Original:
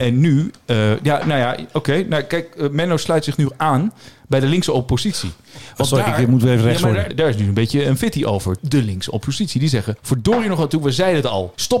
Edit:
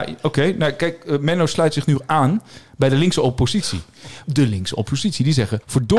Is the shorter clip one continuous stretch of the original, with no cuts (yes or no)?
no